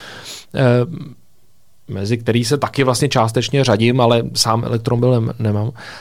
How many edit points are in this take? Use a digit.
0